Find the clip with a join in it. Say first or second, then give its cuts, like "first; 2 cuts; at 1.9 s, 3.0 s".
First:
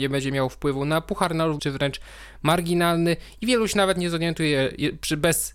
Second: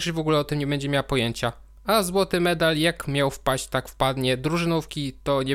first; 1 cut; at 1.6 s